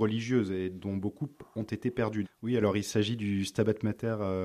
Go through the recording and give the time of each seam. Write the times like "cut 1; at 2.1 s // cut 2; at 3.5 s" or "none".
cut 1; at 2.2 s

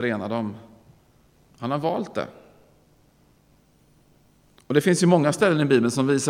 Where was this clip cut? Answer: cut 1; at 1.5 s

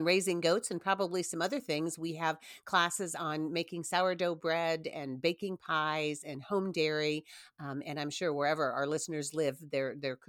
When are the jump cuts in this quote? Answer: none

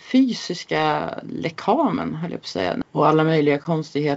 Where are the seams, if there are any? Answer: cut 1; at 2.8 s

